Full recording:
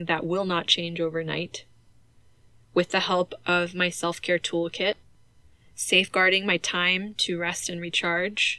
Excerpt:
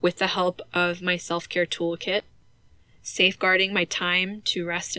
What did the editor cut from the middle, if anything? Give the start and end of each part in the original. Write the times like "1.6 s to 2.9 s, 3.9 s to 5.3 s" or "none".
none